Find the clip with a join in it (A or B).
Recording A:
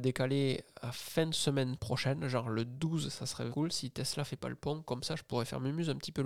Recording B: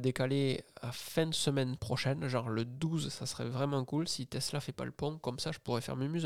A